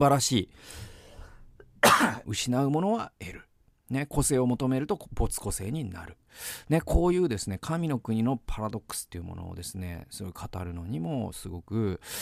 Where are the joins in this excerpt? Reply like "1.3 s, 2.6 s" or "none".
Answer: 2.2 s